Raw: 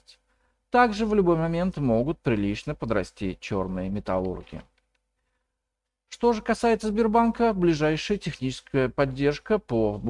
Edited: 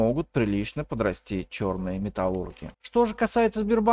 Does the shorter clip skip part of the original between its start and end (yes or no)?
yes